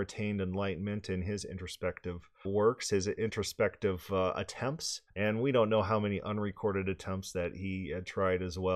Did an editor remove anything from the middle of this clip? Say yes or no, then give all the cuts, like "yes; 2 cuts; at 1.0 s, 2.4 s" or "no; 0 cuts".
yes; 2 cuts; at 2.4 s, 5.1 s